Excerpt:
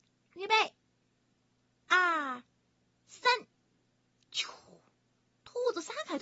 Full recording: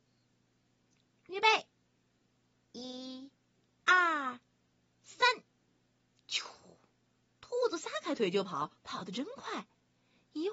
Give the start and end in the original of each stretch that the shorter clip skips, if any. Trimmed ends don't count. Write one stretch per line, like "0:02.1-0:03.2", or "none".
0:02.7-0:03.7

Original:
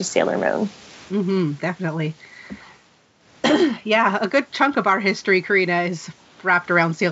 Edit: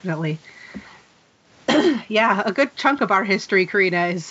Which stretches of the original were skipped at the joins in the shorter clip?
none

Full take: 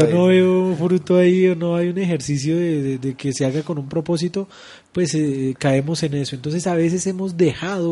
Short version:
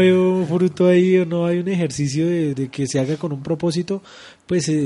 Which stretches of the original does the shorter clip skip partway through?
0:02.8-0:03.0

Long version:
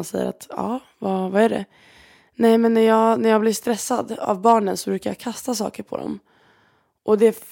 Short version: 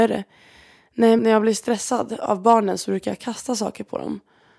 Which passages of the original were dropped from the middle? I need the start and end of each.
0:02.6-0:03.2

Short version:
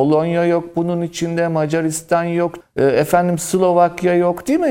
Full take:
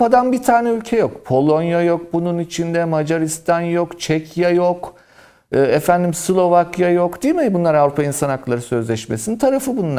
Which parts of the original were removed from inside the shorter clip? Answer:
0:04.0-0:05.4

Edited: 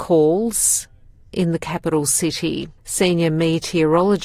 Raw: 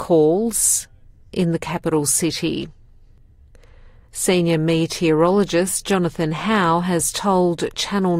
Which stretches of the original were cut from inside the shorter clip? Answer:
0:02.8-0:04.1

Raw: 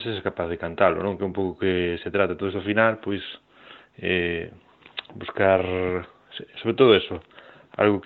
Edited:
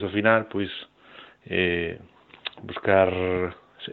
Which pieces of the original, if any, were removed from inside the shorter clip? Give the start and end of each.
none

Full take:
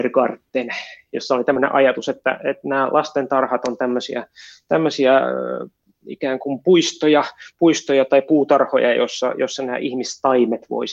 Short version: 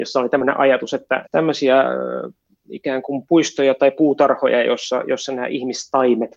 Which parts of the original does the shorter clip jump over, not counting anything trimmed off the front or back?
0:02.4-0:04.6
0:06.6-0:07.5

